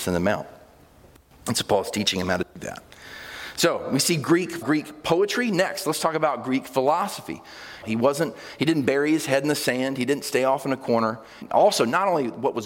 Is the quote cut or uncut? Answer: cut